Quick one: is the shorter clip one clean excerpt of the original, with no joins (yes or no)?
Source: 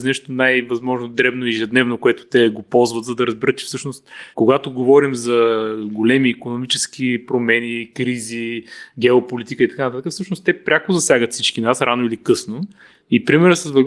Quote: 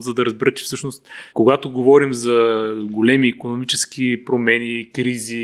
yes